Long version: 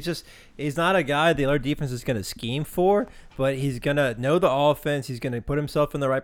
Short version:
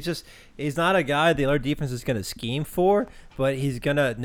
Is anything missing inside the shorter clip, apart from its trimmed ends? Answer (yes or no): no